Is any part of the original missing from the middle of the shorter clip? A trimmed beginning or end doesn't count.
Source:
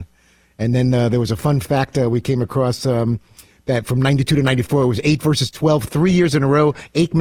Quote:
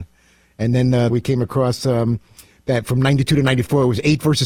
yes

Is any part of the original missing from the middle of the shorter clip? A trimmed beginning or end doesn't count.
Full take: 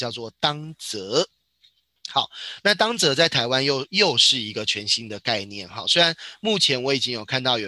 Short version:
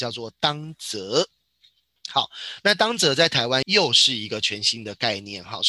yes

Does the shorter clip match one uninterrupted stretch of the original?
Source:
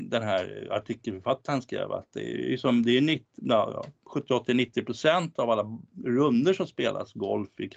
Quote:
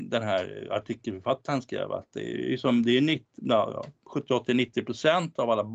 yes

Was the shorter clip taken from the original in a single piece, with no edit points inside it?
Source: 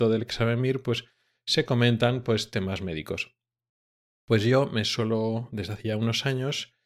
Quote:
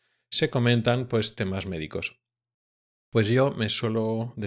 yes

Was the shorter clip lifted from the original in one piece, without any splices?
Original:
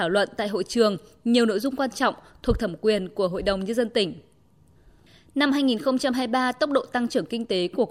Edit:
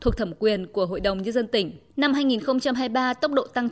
no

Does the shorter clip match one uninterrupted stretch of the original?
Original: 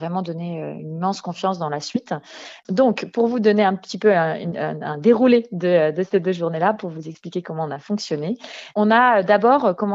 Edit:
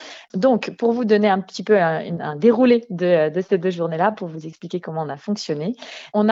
no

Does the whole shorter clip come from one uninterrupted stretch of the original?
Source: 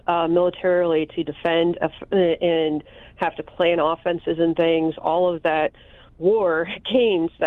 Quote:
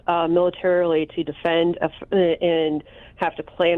yes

